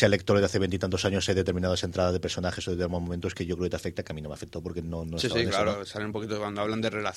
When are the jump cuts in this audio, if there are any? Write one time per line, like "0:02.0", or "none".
none